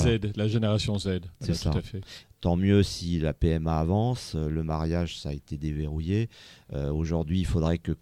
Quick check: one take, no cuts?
no; 1 cut; at 2.2 s

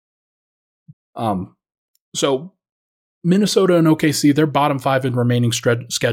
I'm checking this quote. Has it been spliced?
yes; 1 cut; at 0.9 s

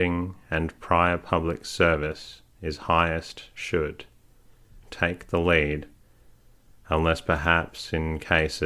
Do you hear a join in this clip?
yes; 1 cut; at 4.8 s

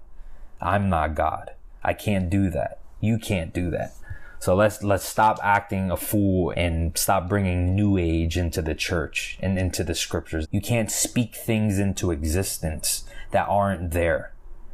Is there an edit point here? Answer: yes; 2 cuts; at 6.5 s, 10.4 s

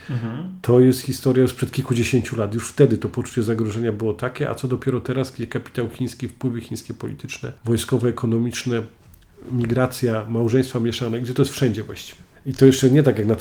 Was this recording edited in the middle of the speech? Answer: yes; 2 cuts; at 7.6 s, 12.4 s

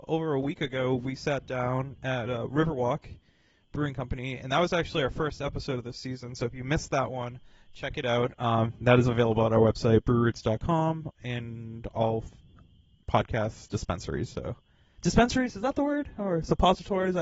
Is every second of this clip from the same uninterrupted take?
yes; 0 cuts

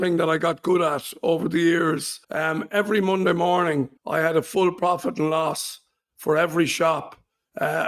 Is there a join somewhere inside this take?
yes; 2 cuts; at 2.2 s, 4.0 s

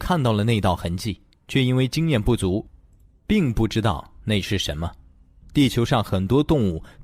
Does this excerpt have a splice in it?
yes; 1 cut; at 5.4 s

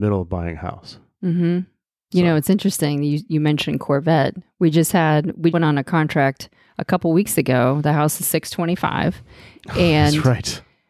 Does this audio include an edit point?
yes; 1 cut; at 5.5 s

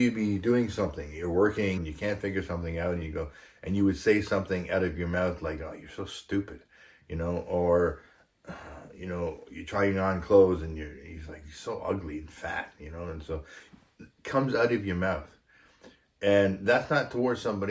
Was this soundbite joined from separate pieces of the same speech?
yes; 1 cut; at 1.8 s

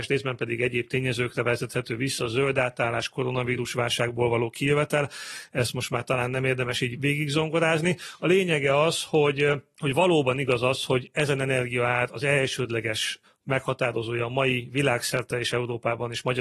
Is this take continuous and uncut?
yes; 0 cuts

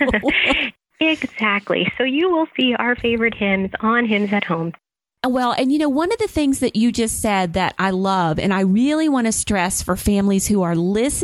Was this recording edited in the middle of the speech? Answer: no; 0 cuts

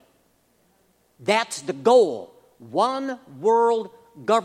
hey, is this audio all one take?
yes; 0 cuts

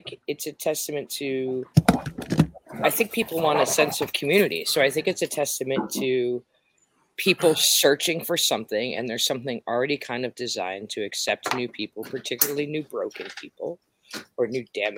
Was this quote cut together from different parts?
no; 0 cuts

